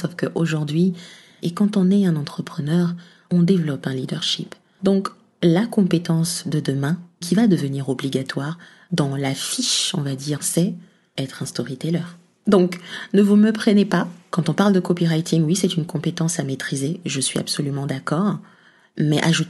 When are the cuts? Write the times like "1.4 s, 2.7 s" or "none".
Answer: 1.4 s, 10.4 s